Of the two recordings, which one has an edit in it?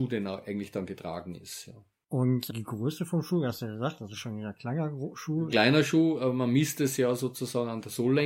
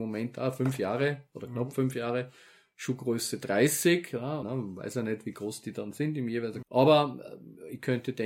second; 2 cuts; at 4.4 s, 6.6 s

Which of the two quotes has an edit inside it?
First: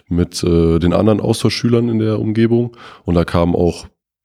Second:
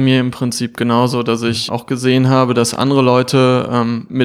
second; 1 cut; at 1.7 s

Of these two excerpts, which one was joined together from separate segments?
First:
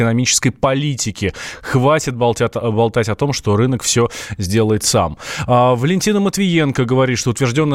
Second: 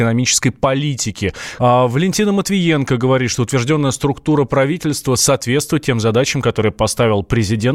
second; 1 cut; at 1.6 s

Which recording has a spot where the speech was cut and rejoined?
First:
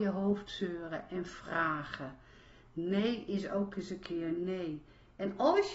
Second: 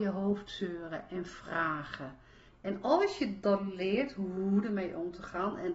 second; 1 cut; at 2.5 s

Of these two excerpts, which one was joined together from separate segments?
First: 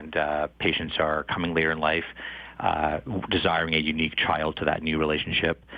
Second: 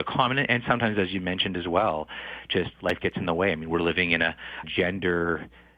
second; 2 cuts; at 2.7 s, 4.6 s

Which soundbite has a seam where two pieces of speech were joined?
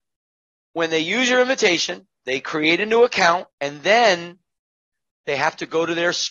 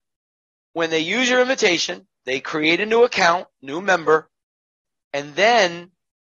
first; 1 cut; at 3.5 s

